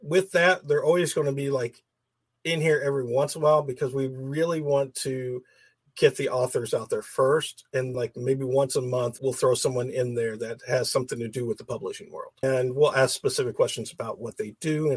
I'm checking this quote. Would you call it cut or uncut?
cut